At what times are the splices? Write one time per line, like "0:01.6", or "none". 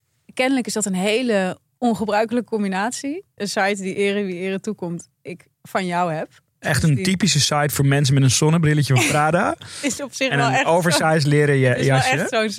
0:03.4